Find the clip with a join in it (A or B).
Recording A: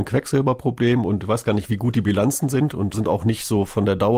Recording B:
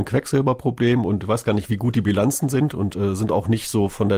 A